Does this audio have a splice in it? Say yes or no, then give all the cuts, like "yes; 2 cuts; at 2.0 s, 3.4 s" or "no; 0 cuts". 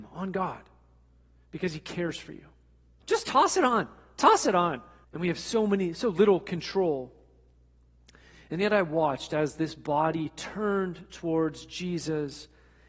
yes; 2 cuts; at 3.0 s, 5.0 s